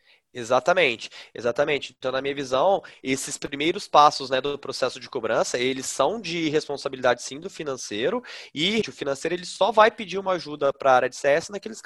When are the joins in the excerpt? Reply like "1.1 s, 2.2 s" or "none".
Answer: 8.8 s